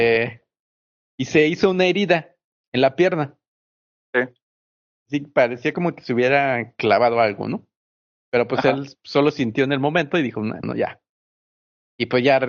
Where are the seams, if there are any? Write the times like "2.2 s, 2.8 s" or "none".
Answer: 10.6 s